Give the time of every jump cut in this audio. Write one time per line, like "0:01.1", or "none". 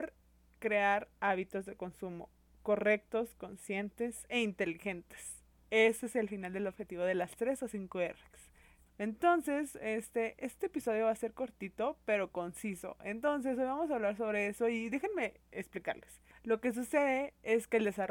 0:08.9
0:16.3